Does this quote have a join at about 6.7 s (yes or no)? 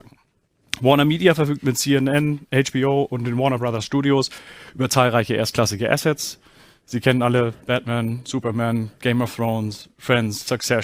no